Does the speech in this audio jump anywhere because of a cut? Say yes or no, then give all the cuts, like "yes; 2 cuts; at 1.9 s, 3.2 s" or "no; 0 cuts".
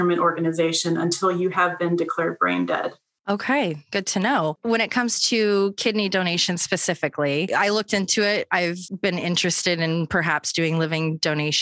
no; 0 cuts